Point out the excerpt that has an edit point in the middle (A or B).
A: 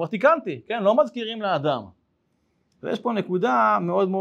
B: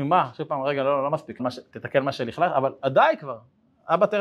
B